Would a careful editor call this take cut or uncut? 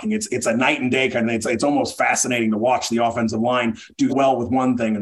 cut